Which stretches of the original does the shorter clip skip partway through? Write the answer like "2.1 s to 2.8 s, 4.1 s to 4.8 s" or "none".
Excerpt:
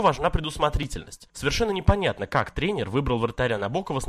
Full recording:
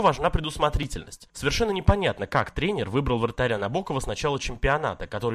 none